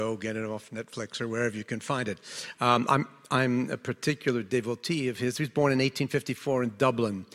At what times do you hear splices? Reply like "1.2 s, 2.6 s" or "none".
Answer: 2.5 s